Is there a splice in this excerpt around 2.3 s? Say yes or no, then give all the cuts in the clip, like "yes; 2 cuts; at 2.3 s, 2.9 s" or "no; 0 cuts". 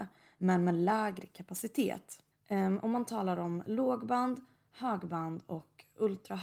yes; 1 cut; at 2.3 s